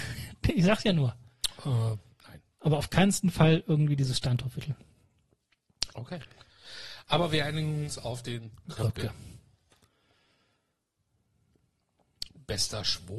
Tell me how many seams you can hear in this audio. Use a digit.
1